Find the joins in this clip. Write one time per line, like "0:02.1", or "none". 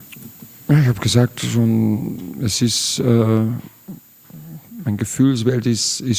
none